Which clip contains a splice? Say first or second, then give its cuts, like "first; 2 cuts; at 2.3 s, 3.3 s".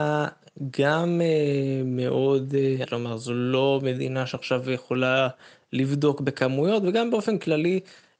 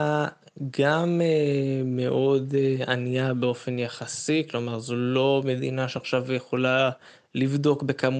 first; 1 cut; at 2.9 s